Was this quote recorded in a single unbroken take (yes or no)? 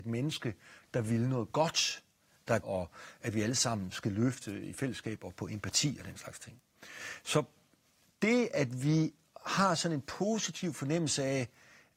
no